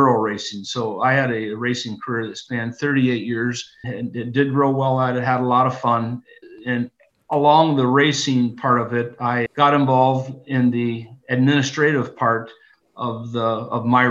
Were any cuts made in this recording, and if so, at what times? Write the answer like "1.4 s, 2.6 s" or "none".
3.8 s